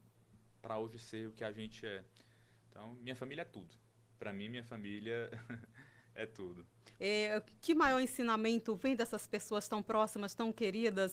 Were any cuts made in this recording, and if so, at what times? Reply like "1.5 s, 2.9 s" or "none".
7.0 s